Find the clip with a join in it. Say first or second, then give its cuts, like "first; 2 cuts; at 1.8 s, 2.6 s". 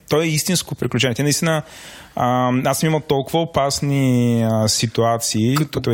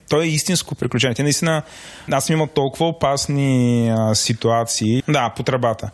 second; 2 cuts; at 2.1 s, 5.0 s